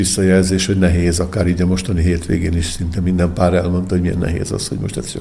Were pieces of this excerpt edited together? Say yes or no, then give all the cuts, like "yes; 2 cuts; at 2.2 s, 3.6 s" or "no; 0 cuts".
no; 0 cuts